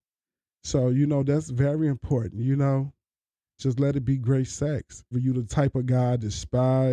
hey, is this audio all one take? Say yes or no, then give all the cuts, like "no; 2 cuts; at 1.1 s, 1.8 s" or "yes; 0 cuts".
no; 2 cuts; at 3.6 s, 5.1 s